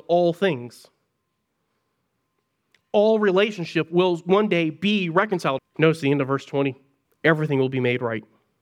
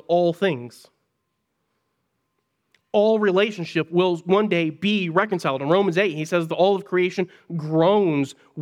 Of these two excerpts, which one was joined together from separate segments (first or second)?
first